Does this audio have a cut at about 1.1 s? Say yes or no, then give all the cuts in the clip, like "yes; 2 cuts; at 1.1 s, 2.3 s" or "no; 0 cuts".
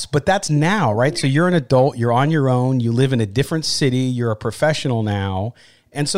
no; 0 cuts